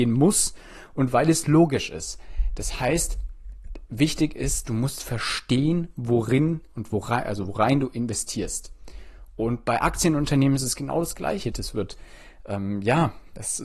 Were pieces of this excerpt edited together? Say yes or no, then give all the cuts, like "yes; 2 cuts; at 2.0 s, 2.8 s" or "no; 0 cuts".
yes; 1 cut; at 11.5 s